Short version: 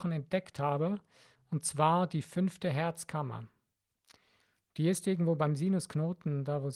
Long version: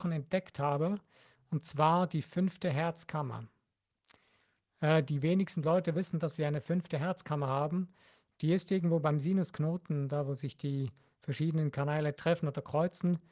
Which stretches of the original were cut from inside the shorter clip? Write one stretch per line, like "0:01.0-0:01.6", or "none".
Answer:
0:04.7-0:08.3